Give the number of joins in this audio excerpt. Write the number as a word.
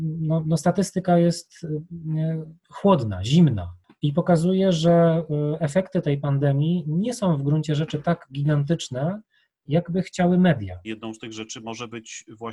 one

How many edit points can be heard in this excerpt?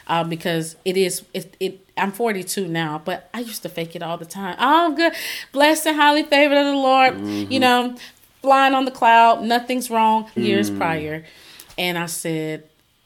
one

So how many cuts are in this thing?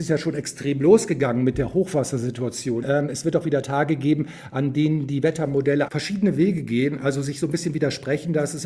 two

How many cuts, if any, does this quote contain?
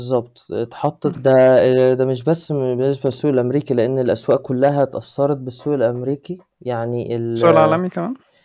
one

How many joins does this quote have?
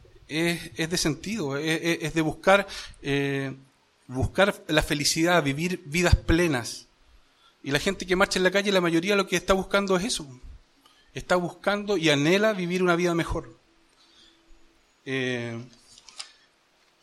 zero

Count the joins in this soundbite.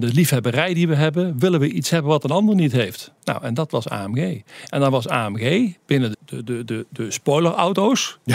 one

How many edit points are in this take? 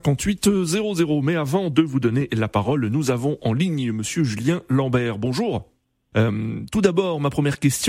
one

